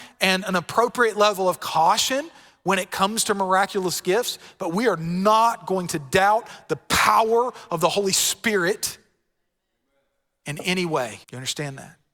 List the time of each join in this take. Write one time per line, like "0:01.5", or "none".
0:11.2